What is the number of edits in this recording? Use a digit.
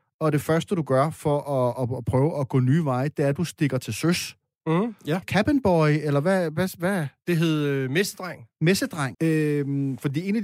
2